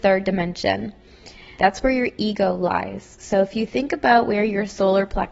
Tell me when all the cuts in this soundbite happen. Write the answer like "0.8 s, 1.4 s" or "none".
1.6 s